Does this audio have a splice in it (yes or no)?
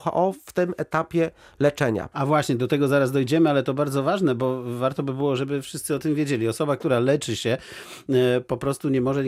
yes